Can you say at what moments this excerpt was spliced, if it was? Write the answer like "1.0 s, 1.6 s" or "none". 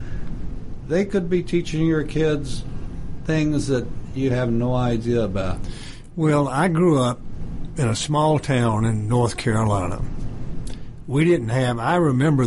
none